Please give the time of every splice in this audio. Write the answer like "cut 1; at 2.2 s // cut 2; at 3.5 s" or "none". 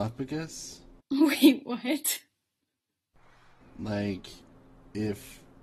cut 1; at 1.0 s